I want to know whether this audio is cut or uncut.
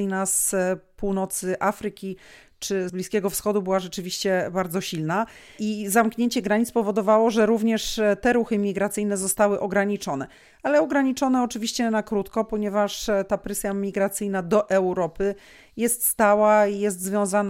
cut